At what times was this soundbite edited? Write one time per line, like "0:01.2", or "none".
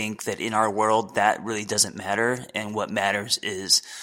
none